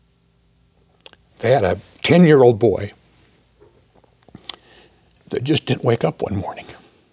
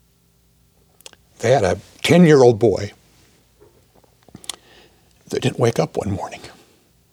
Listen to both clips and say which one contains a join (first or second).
second